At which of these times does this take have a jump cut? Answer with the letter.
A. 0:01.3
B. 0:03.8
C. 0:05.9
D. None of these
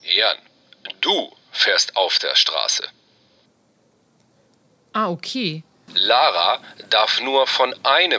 C